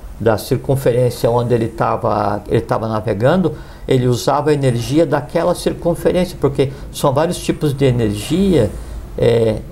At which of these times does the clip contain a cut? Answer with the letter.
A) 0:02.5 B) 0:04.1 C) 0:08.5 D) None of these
D